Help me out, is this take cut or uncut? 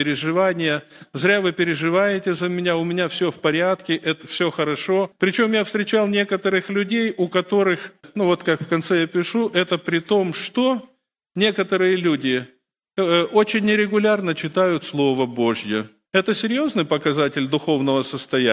uncut